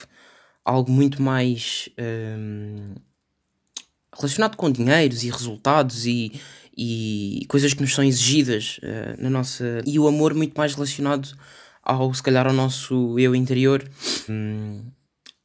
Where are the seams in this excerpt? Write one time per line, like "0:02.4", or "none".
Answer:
0:09.8
0:14.3